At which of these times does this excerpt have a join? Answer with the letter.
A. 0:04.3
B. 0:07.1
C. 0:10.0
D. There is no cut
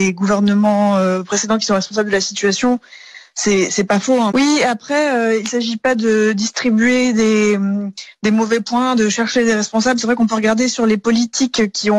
A